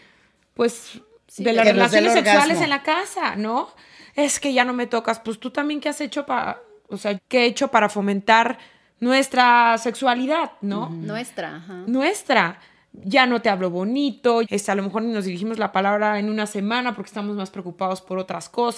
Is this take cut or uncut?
cut